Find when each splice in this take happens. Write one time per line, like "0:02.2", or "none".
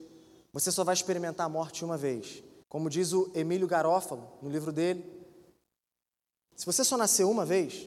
0:02.6
0:06.5